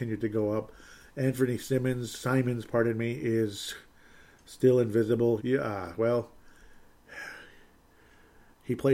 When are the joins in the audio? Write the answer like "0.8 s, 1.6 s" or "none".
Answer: 5.4 s